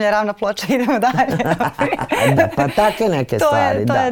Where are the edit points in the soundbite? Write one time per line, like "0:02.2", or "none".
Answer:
0:02.4